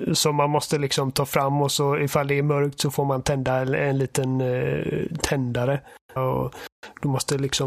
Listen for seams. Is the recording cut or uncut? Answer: cut